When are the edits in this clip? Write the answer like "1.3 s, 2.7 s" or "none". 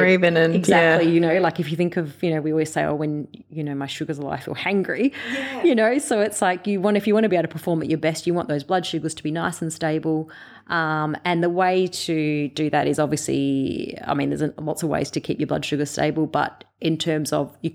none